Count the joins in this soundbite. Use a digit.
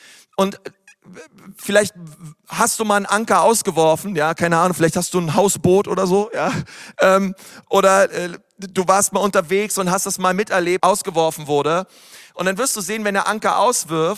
1